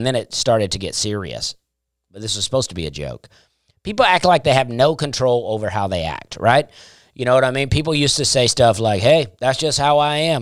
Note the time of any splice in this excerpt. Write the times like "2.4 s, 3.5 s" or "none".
none